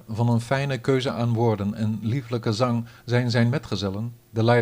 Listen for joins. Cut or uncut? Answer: uncut